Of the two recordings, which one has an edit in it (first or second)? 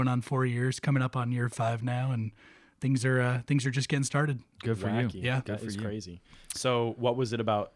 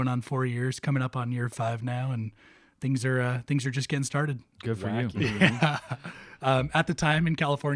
second